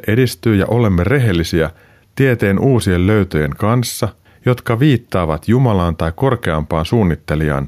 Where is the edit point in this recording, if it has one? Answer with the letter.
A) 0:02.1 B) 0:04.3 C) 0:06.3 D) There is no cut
B